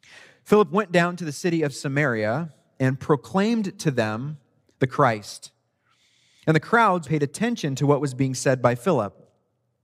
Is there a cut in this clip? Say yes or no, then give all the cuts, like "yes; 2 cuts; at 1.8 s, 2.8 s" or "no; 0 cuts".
yes; 1 cut; at 7.0 s